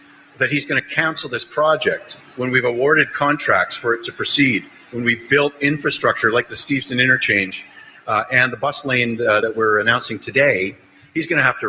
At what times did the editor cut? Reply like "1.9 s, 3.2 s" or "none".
none